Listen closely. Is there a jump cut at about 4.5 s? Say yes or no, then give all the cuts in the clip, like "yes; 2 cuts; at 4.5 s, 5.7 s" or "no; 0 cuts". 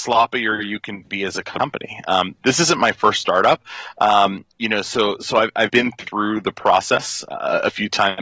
yes; 1 cut; at 4.5 s